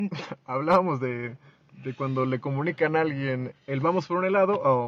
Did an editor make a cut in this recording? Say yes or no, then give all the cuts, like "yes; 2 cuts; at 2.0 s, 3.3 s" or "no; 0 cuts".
yes; 1 cut; at 3.5 s